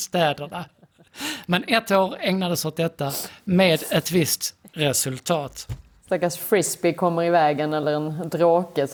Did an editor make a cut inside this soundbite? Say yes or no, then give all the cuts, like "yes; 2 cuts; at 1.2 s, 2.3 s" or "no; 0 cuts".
no; 0 cuts